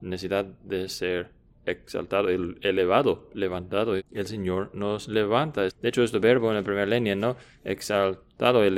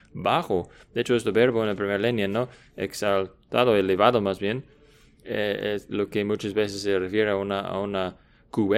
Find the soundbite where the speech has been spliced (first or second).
first